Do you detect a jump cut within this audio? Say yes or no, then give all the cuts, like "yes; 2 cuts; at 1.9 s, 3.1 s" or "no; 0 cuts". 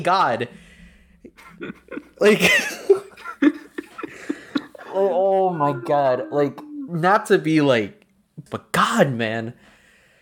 yes; 1 cut; at 8.5 s